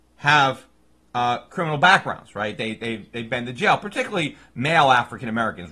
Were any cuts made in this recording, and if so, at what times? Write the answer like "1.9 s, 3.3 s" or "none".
none